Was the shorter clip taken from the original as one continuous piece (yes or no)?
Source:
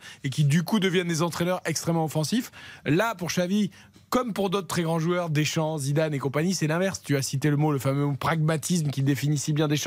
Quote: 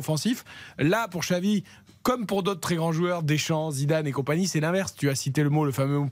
yes